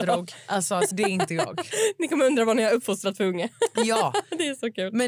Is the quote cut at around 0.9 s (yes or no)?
yes